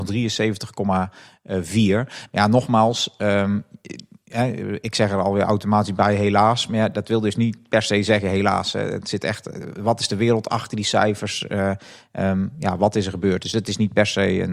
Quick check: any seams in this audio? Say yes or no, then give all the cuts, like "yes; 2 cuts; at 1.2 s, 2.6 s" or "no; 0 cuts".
no; 0 cuts